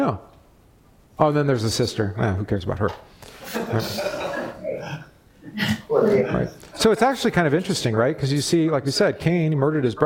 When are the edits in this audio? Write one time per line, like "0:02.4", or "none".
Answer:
none